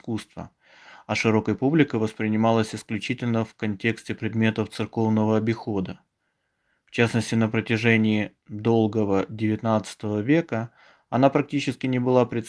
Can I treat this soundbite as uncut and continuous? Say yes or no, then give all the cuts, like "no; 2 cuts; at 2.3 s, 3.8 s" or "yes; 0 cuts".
yes; 0 cuts